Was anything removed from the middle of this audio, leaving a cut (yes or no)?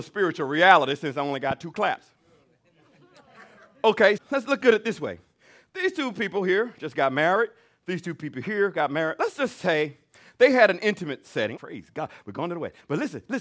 yes